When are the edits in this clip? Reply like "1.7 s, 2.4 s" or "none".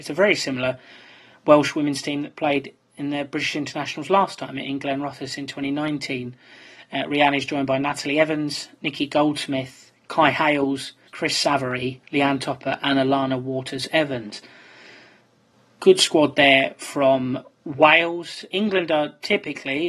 11.1 s